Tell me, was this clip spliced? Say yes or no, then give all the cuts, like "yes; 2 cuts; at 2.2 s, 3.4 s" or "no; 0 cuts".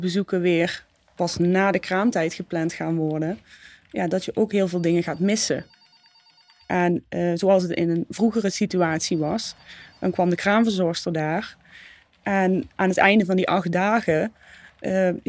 no; 0 cuts